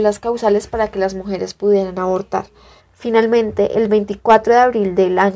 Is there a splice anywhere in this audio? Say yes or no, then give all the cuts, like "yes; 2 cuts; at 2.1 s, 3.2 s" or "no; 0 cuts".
yes; 1 cut; at 2.8 s